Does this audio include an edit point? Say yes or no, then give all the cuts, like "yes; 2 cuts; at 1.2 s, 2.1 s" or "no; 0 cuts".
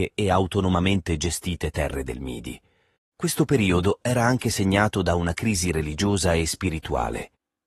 yes; 1 cut; at 3.0 s